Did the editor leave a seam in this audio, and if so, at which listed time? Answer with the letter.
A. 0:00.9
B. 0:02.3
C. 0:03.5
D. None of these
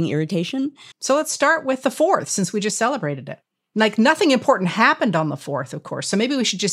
A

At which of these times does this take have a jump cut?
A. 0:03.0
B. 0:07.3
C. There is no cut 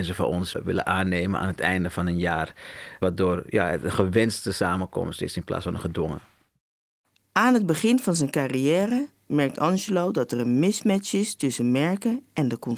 C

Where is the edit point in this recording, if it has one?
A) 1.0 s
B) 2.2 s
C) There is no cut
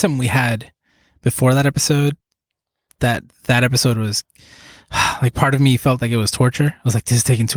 C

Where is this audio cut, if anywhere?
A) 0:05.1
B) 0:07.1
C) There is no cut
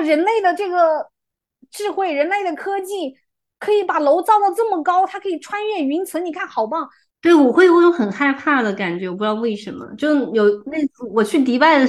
B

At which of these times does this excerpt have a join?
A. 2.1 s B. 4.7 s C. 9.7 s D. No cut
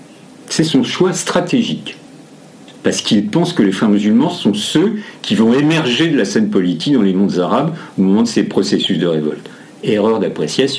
D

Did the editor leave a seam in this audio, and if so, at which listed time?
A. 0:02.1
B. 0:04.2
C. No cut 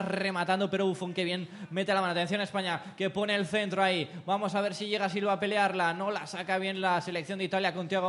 C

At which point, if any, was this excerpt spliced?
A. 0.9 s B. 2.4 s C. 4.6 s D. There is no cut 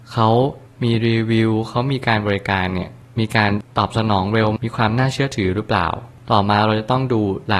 C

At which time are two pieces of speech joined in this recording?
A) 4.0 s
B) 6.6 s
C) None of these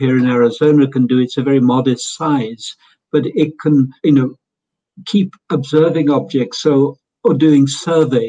A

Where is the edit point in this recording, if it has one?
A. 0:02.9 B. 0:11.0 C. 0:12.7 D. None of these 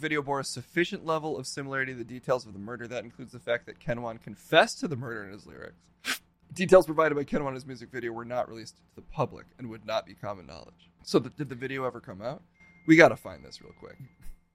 B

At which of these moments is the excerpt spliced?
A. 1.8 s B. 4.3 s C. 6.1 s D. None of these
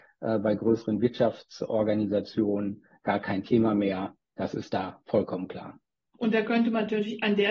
C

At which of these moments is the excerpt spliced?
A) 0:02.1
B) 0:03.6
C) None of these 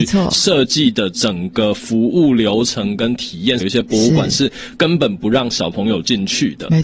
B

